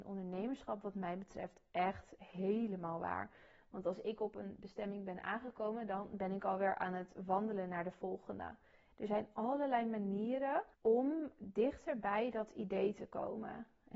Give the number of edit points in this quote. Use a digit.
2